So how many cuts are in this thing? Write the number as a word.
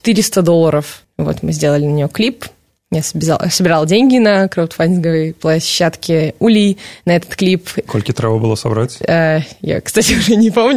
two